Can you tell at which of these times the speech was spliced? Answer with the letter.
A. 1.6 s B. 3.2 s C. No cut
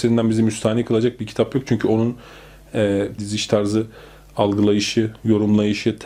B